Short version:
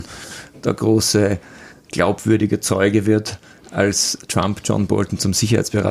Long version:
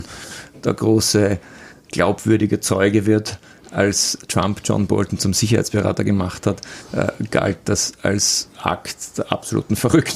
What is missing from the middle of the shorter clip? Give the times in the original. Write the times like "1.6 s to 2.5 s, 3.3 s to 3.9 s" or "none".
none